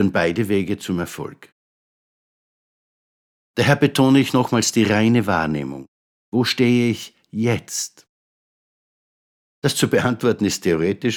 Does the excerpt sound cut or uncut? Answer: uncut